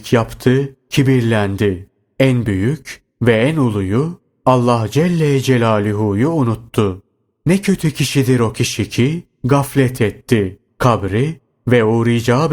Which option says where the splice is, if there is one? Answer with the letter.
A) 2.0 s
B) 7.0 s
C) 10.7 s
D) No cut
C